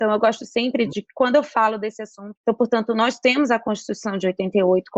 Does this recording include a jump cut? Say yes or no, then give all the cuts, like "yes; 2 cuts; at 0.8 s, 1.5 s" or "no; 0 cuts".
yes; 1 cut; at 2.4 s